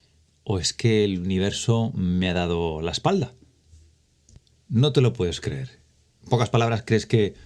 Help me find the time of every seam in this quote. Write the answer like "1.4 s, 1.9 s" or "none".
none